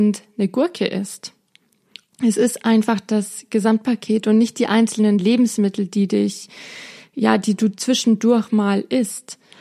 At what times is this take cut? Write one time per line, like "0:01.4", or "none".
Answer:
0:02.1